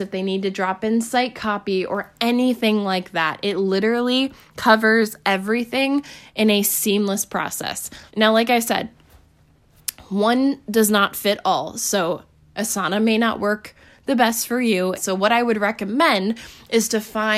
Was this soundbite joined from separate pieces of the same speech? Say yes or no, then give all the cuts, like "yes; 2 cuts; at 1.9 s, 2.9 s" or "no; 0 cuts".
yes; 2 cuts; at 8.1 s, 14.9 s